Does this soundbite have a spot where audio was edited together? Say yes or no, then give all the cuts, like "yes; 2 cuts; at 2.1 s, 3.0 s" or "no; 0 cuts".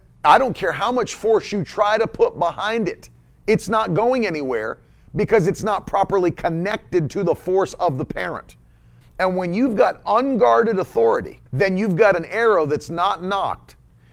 yes; 2 cuts; at 9.0 s, 11.5 s